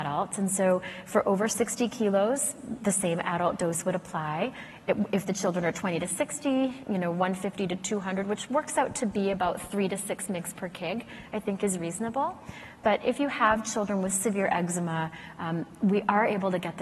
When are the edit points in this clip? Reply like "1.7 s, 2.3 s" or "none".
none